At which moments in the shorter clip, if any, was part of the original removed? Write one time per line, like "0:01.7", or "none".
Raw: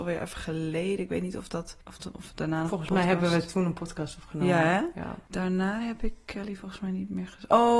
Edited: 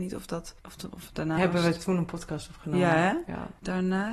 0:01.4